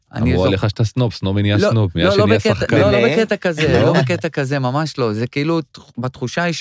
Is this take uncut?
yes; 0 cuts

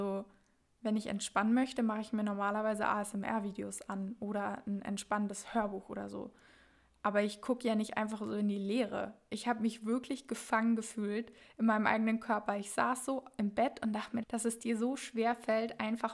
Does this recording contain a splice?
yes; 1 cut; at 14.2 s

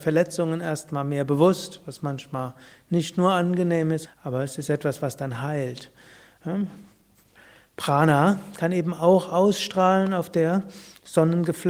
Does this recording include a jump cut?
yes; 1 cut; at 4.0 s

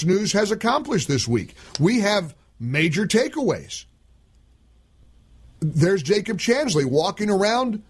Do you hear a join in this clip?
no; 0 cuts

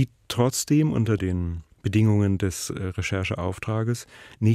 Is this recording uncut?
yes; 0 cuts

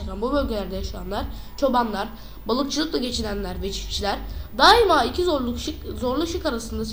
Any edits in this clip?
no; 0 cuts

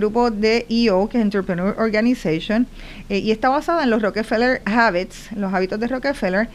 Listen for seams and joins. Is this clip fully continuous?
no; 1 cut; at 4.6 s

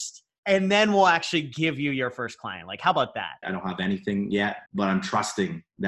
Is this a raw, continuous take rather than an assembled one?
no; 2 cuts; at 3.4 s, 4.7 s

